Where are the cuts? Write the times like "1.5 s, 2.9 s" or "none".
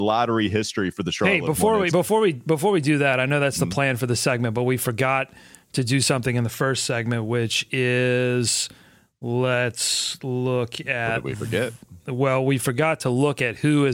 none